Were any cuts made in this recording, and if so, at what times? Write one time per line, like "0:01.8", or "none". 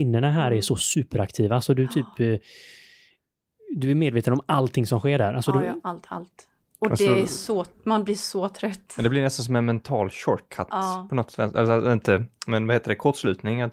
0:05.8